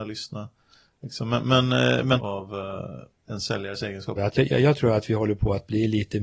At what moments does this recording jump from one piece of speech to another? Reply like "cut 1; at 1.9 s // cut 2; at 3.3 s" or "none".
cut 1; at 2.2 s // cut 2; at 4.2 s